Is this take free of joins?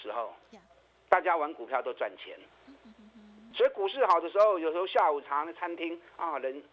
no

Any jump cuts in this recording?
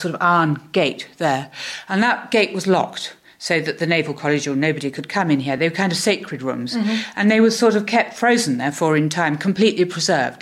no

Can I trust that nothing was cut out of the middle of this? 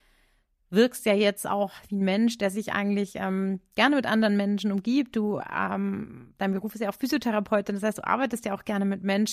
yes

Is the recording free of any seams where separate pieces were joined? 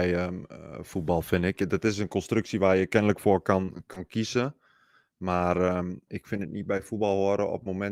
no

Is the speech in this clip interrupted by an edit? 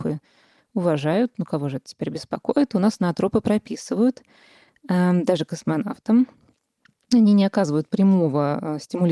no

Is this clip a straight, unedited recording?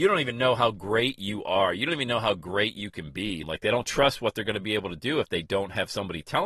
no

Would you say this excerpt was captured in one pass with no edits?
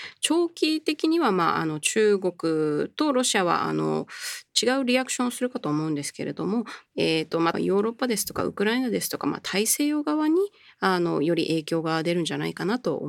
no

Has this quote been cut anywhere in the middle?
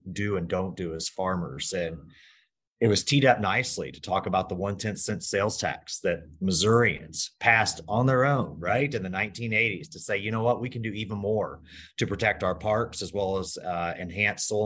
no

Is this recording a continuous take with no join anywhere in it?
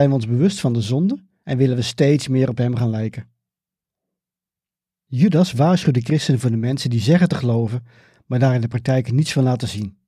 yes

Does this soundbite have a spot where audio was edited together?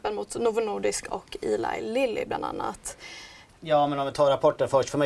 yes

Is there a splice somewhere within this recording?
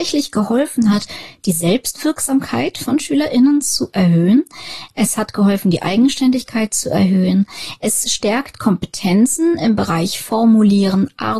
no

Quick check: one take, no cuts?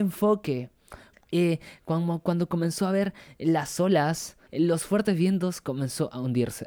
no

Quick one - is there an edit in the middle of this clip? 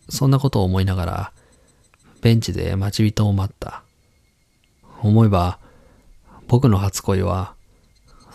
yes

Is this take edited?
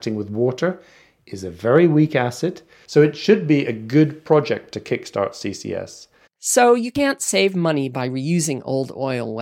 yes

